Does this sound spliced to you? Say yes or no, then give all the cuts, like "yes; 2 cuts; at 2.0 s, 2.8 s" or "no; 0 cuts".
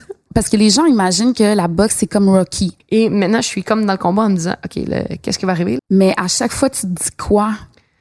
yes; 2 cuts; at 2.8 s, 5.8 s